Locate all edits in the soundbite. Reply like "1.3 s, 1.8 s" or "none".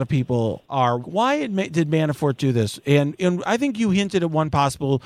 1.0 s